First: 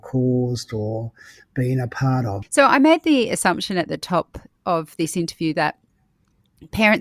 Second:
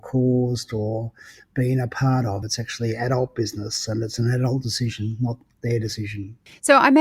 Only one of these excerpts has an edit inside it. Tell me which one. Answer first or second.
first